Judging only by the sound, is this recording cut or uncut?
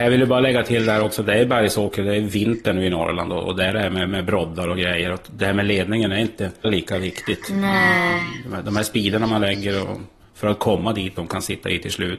cut